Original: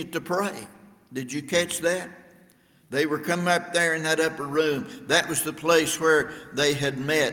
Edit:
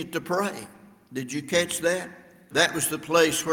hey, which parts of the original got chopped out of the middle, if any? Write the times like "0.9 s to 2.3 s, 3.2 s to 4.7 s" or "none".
2.5 s to 5.0 s